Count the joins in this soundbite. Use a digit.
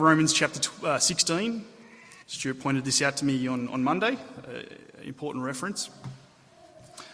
1